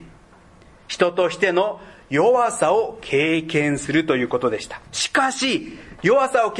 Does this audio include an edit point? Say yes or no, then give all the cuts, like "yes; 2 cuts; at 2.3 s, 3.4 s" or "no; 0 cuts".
yes; 1 cut; at 4.9 s